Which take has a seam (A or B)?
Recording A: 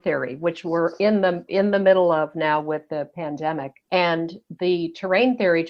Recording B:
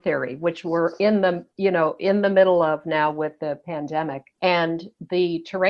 A